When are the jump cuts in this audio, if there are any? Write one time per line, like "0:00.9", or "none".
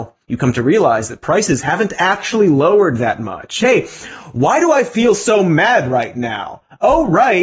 none